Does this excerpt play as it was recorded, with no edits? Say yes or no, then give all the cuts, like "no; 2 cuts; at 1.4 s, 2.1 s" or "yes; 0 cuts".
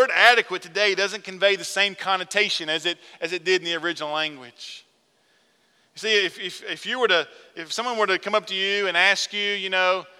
yes; 0 cuts